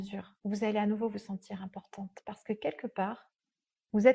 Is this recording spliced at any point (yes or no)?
no